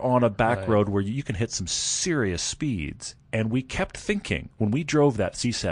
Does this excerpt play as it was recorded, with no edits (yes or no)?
yes